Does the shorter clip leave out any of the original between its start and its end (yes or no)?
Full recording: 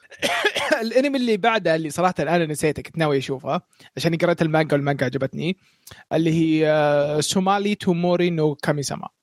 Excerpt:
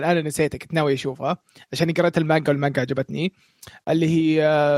no